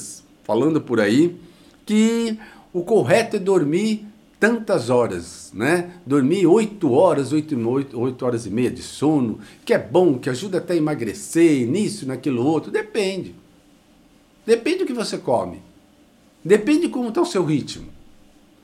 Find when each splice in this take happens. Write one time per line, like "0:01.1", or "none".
none